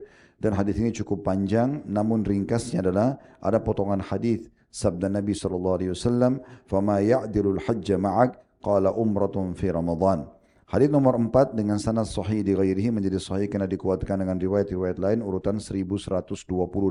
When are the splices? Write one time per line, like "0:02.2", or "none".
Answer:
0:10.6